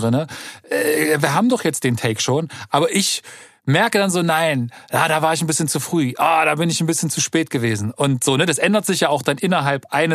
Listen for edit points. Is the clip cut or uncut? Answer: uncut